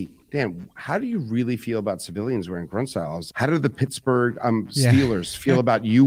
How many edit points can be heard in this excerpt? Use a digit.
1